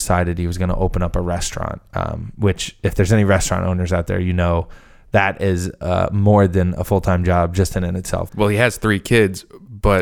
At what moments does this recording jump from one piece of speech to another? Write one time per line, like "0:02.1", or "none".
0:08.3